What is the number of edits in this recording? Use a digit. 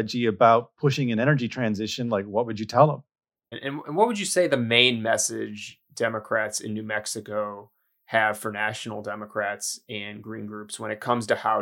1